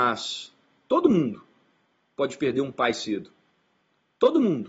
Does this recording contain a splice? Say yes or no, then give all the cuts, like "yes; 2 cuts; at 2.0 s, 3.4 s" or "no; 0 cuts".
no; 0 cuts